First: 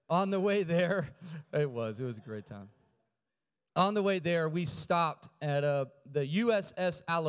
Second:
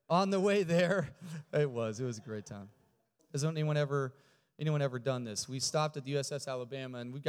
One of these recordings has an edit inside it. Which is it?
second; 1 cut; at 3.2 s

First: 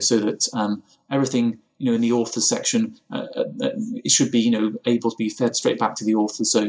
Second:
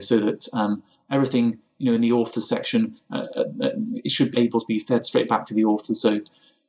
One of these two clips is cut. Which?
second; 1 cut; at 4.3 s

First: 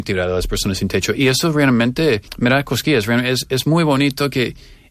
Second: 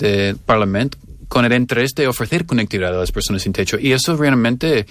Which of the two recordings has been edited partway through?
first; 1 cut; at 2.3 s

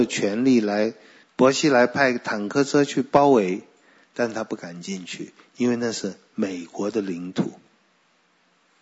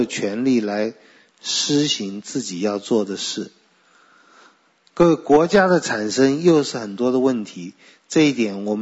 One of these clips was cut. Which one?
first; 1 cut; at 1.2 s

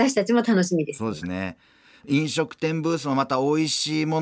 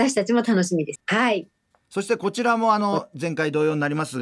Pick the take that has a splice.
second; 1 cut; at 1.0 s

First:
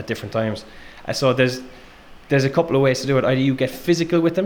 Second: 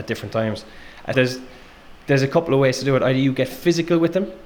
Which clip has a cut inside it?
second; 1 cut; at 1.1 s

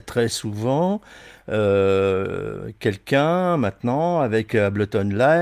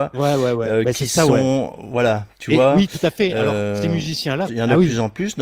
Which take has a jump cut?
second; 1 cut; at 4.5 s

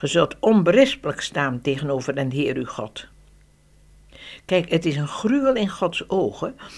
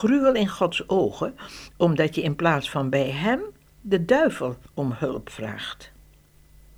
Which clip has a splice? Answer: second; 1 cut; at 4.7 s

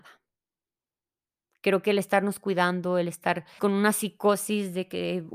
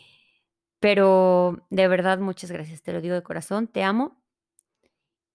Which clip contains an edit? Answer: first; 1 cut; at 3.6 s

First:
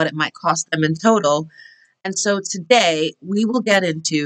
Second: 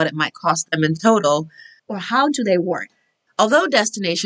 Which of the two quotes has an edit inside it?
second; 2 cuts; at 1.8 s, 3.3 s

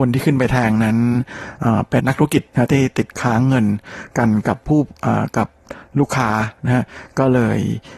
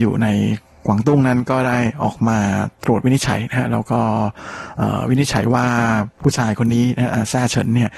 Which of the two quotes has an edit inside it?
first; 1 cut; at 2.0 s

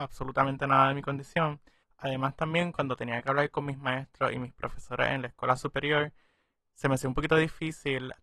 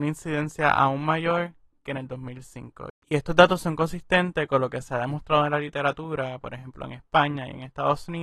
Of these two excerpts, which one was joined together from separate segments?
first; 1 cut; at 1.8 s

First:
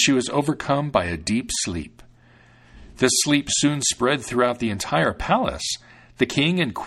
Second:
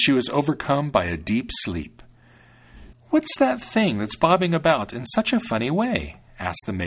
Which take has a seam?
second; 1 cut; at 2.9 s

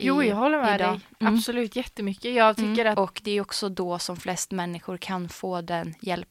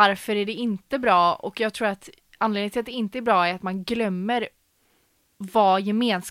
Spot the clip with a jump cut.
first; 1 cut; at 2.9 s

